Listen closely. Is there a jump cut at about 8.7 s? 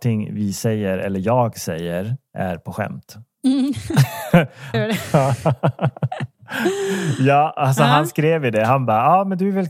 no; 1 cut; at 4.7 s

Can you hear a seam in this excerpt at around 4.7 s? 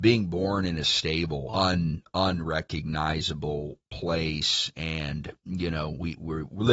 no; 1 cut; at 1.5 s

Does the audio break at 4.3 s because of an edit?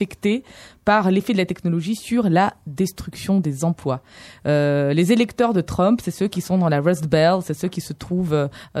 no; 0 cuts

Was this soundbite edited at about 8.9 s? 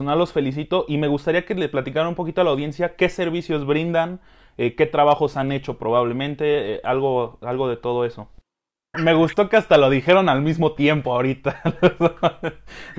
yes; 1 cut; at 8.9 s

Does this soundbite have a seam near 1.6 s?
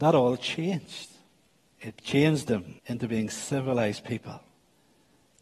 yes; 2 cuts; at 1.6 s, 2.8 s

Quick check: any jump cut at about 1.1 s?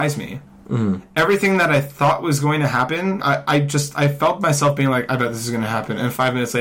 no; 1 cut; at 3.2 s

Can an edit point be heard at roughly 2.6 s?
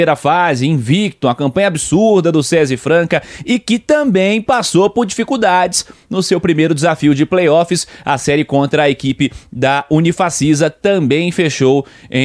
no; 0 cuts

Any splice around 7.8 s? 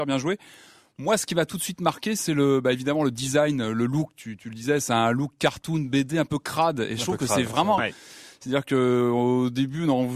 yes; 1 cut; at 7.8 s

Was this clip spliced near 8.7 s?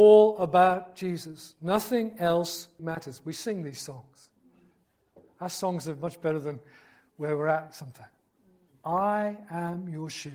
yes; 2 cuts; at 2.8 s, 8.7 s

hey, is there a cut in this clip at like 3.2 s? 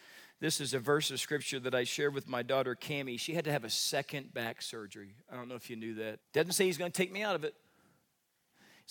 no; 1 cut; at 6.2 s

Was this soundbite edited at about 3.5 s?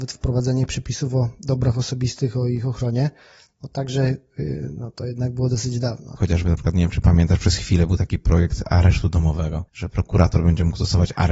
no; 2 cuts; at 6.2 s, 9.7 s

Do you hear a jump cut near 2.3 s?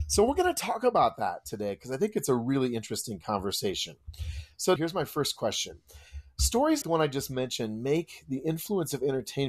no; 2 cuts; at 4.8 s, 6.8 s

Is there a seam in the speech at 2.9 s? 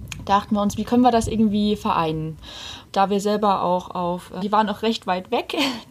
no; 1 cut; at 4.4 s

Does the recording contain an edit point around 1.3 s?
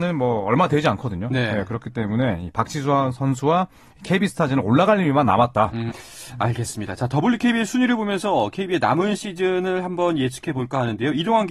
no; 1 cut; at 5.9 s

